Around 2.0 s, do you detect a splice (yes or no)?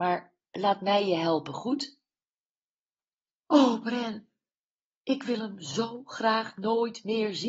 no